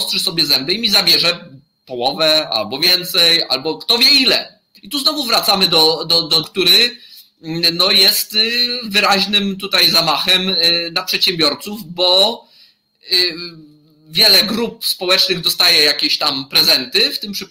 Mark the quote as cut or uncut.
cut